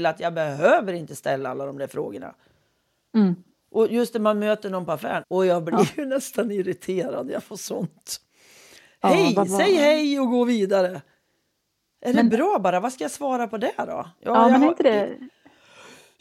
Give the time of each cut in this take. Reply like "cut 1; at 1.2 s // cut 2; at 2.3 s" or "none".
cut 1; at 5.2 s